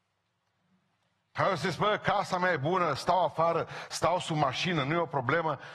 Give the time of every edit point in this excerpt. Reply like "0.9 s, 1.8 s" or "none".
none